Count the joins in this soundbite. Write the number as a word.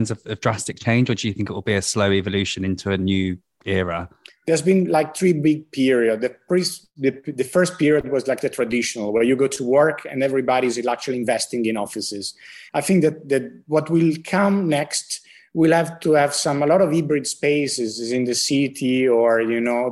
two